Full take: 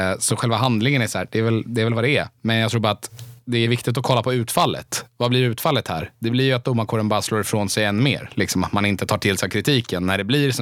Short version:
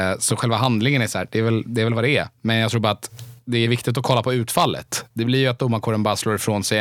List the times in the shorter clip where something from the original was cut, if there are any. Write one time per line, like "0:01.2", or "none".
0:05.1